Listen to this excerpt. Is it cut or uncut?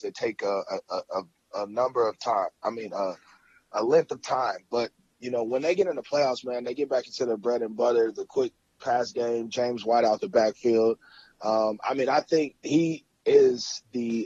uncut